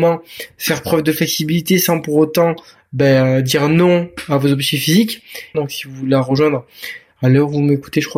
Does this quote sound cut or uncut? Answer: cut